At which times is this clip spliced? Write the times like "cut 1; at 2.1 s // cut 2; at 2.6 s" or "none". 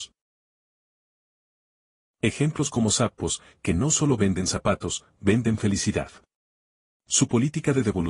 none